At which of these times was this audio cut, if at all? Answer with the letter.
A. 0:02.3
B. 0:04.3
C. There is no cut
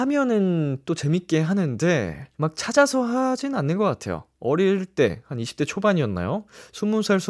A